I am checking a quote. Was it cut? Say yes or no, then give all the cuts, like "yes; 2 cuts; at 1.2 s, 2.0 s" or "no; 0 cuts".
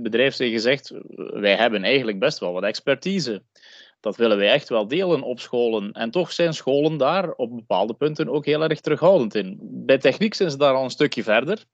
yes; 1 cut; at 9.6 s